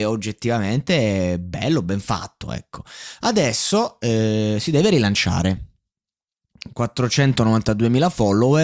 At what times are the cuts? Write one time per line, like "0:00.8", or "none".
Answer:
none